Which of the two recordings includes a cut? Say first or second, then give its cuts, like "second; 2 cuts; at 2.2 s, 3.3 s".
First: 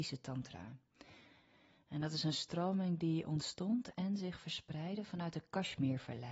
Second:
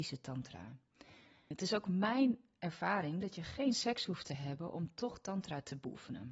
second; 1 cut; at 1.5 s